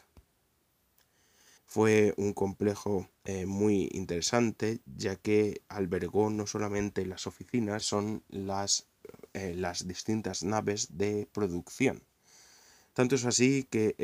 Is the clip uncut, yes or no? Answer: no